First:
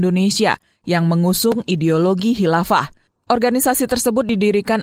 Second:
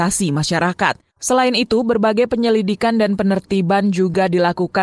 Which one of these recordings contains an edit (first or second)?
second